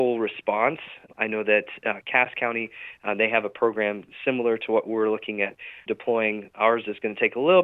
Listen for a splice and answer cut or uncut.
uncut